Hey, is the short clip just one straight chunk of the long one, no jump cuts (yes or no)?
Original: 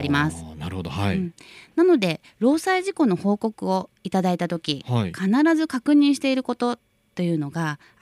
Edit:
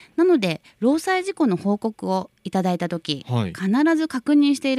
yes